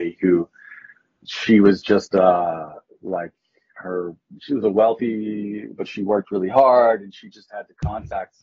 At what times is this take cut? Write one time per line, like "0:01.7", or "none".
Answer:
none